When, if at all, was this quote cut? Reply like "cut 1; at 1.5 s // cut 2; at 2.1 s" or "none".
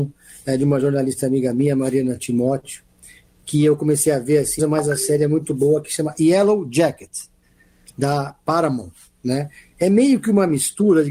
cut 1; at 4.6 s